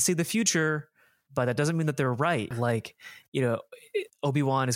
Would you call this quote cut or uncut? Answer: cut